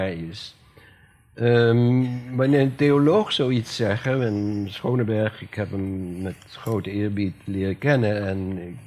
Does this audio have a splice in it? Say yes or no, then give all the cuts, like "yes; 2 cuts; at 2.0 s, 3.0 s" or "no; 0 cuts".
no; 0 cuts